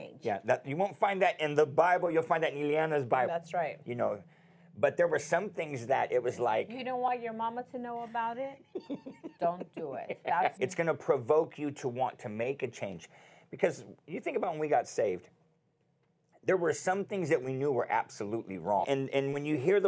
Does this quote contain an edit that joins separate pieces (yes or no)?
yes